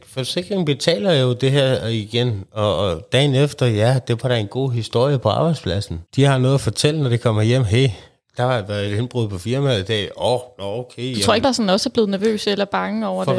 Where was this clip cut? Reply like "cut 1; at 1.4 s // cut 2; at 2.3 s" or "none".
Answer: cut 1; at 6.1 s // cut 2; at 11.4 s